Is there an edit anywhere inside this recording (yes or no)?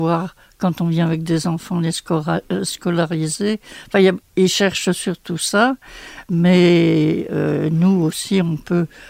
no